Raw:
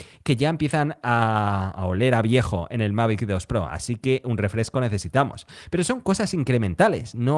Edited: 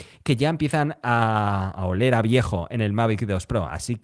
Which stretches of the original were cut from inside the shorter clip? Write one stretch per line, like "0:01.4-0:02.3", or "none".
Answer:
none